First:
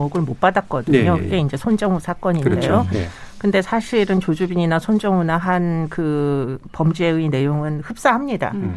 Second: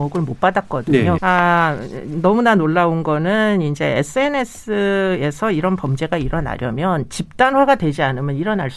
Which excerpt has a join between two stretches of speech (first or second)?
second